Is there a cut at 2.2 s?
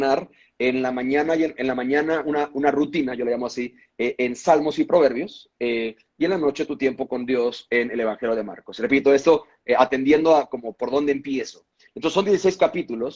no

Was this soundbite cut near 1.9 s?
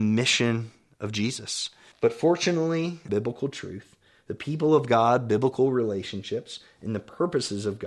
yes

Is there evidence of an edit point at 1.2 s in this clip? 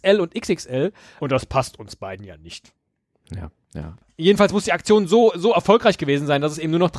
yes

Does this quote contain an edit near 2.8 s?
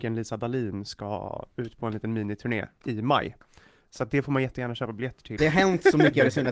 yes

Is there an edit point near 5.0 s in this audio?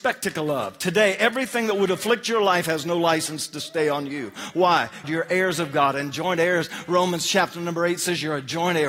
yes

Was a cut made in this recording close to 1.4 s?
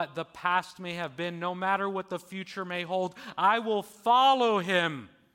no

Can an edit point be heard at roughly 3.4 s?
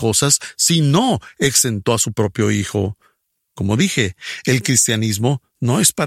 yes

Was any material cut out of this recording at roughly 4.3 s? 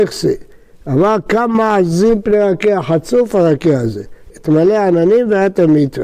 yes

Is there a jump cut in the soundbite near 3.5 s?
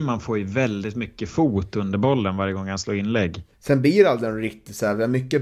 yes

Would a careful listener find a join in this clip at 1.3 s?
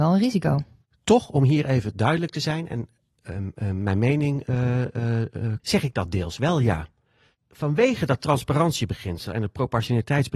no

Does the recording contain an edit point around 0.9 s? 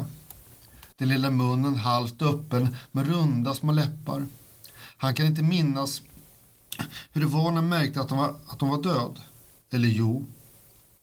yes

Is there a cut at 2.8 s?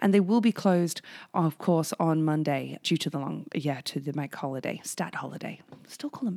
yes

